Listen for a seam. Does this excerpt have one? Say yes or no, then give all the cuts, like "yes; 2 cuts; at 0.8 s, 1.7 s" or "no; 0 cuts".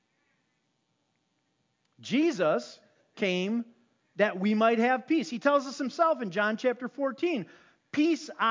no; 0 cuts